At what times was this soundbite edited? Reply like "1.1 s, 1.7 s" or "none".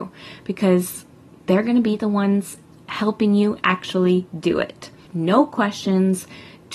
5.1 s